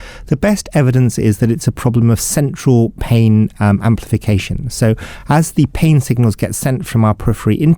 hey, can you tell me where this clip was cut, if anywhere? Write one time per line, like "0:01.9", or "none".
none